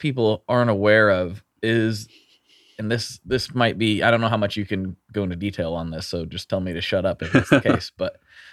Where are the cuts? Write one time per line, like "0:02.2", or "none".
0:01.5

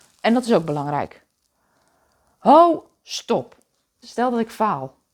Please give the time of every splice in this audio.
0:04.0

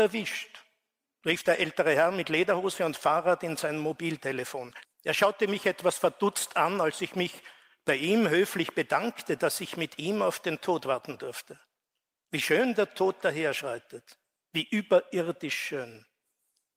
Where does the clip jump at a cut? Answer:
0:04.8
0:12.2

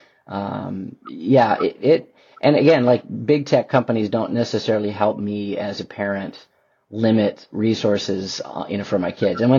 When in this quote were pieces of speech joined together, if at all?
none

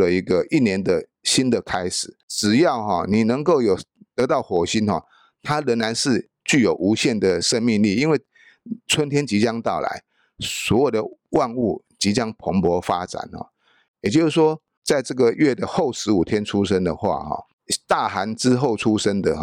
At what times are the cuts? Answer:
none

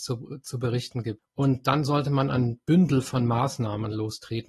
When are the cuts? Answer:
0:01.2

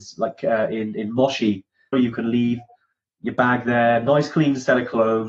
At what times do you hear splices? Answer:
0:01.9

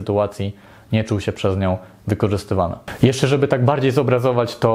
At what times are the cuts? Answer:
none

